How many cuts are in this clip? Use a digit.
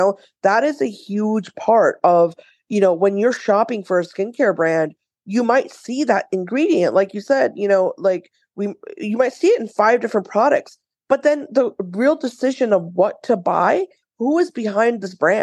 1